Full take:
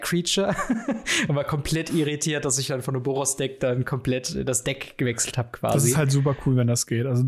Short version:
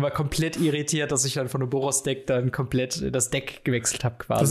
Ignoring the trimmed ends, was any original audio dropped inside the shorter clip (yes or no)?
no